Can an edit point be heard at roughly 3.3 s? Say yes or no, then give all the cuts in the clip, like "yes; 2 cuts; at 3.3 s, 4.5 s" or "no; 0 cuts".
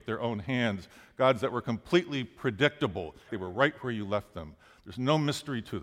yes; 1 cut; at 3.3 s